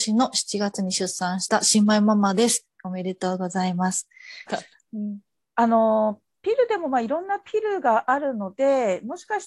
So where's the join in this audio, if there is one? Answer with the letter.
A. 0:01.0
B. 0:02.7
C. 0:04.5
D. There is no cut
C